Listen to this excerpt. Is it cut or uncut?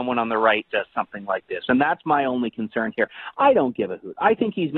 uncut